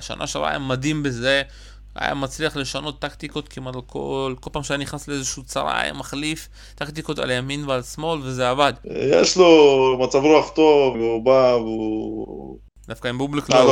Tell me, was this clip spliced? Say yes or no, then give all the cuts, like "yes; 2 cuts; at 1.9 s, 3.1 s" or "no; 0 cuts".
yes; 3 cuts; at 8.8 s, 10.9 s, 12.7 s